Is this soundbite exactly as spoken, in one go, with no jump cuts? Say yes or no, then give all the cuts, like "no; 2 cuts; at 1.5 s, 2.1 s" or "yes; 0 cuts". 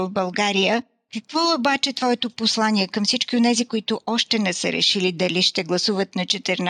no; 1 cut; at 3.7 s